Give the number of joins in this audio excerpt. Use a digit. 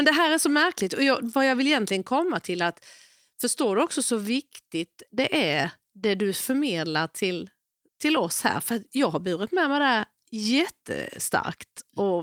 0